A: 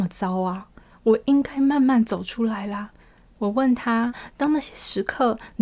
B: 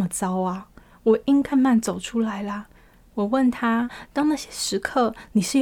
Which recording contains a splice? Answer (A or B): B